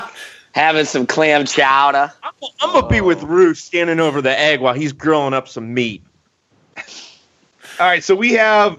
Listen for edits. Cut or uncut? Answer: uncut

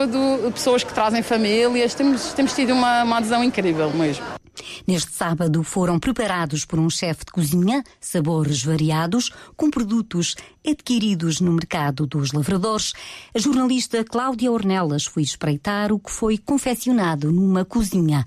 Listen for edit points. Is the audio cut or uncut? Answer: uncut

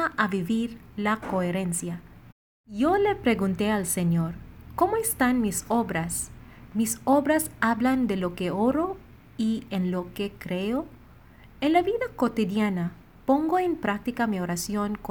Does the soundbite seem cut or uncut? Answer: uncut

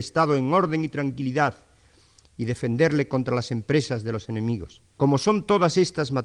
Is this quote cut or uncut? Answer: cut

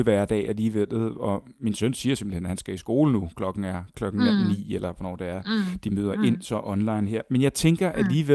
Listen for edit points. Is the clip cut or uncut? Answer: uncut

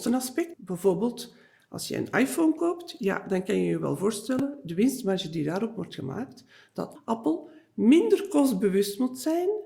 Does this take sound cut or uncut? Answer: uncut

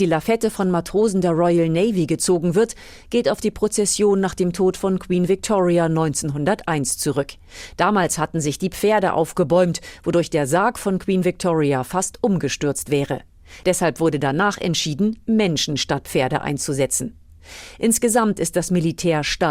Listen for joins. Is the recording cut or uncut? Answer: uncut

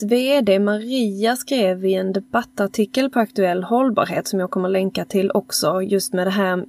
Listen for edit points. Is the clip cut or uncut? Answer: uncut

